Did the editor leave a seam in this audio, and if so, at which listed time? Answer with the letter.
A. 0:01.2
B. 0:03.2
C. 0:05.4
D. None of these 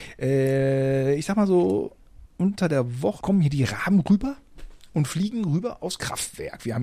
B